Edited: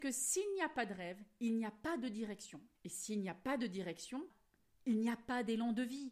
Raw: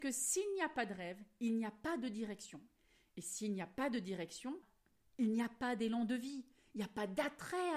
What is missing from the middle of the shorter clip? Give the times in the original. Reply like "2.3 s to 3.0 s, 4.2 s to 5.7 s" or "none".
2.7 s to 3.1 s